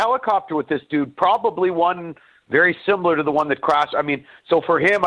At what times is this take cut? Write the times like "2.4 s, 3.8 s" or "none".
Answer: none